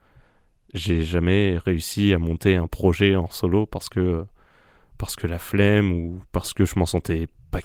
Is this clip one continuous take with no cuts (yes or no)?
yes